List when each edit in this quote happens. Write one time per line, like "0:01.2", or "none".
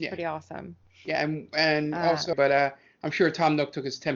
0:02.3